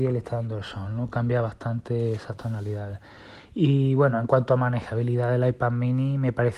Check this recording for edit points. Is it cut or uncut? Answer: uncut